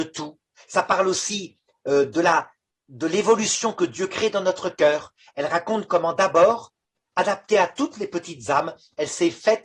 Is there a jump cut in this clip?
no; 0 cuts

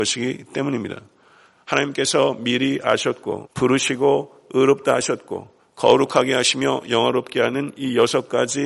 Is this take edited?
yes; 1 cut; at 3.5 s

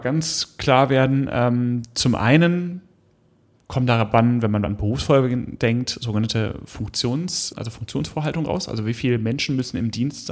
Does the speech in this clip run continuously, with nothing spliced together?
no; 1 cut; at 7.5 s

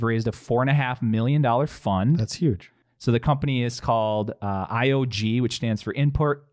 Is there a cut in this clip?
yes; 1 cut; at 2.8 s

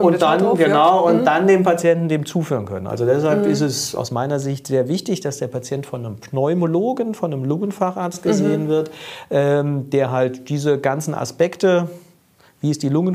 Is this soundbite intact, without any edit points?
yes; 0 cuts

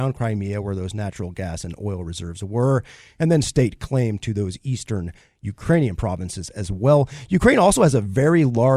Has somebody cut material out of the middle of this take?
no; 0 cuts

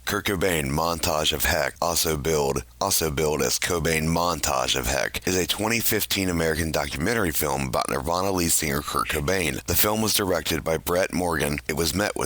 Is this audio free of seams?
yes; 0 cuts

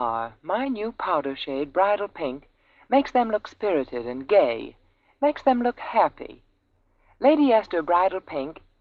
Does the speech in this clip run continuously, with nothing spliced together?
yes; 0 cuts

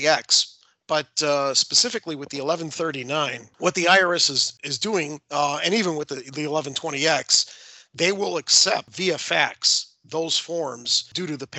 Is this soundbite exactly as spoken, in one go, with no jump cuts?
yes; 0 cuts

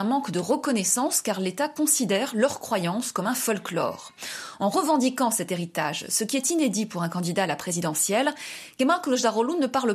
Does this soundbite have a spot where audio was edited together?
no; 0 cuts

